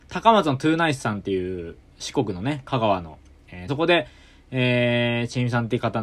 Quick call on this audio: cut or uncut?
cut